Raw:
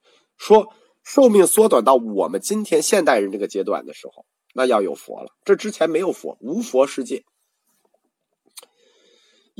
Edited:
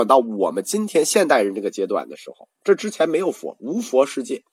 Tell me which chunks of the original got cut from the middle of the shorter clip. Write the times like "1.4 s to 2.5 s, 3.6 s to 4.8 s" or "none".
4.3 s to 5.4 s

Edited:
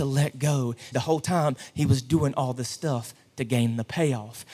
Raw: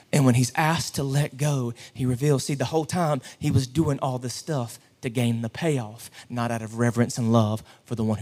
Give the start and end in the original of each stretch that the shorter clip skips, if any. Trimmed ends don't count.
1.9 s to 2.6 s

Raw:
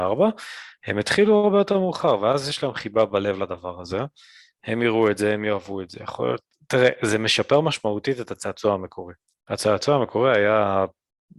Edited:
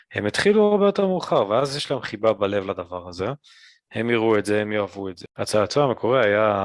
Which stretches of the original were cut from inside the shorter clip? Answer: 6.0 s to 9.4 s

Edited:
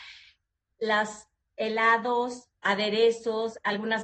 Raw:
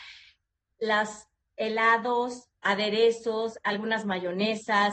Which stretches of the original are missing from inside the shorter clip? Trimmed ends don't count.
none

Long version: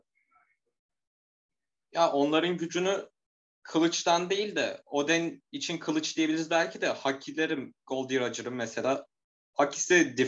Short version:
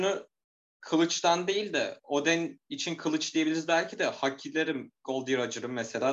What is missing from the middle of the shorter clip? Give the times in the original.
none

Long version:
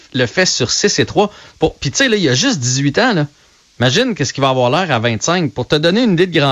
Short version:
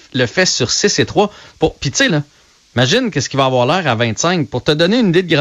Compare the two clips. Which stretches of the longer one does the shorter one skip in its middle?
2.1 s to 3.1 s

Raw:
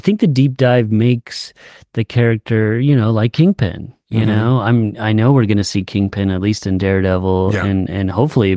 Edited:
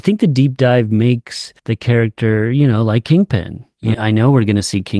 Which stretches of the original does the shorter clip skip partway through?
1.6 s to 1.9 s, 4.2 s to 5.0 s

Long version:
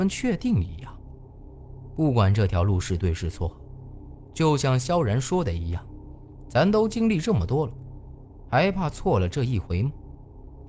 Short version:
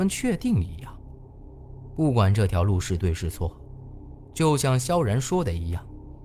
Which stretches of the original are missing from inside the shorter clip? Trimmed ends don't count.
none

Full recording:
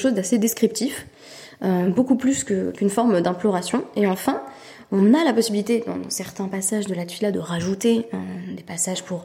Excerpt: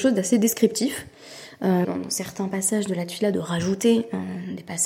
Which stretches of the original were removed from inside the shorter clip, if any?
1.8 s to 5.8 s

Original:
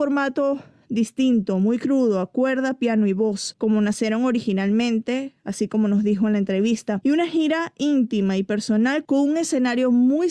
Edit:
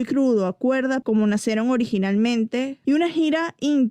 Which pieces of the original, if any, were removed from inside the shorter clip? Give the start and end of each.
2.8 s to 3.6 s, 5.4 s to 7.0 s

